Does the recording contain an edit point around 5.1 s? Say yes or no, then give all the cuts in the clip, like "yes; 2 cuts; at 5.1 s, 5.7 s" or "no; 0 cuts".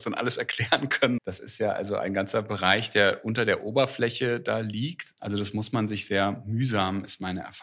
yes; 2 cuts; at 1.2 s, 5.1 s